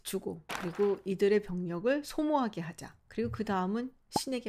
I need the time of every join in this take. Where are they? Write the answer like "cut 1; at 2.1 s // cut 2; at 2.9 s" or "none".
none